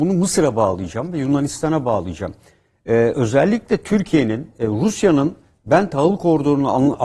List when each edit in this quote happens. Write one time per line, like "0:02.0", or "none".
none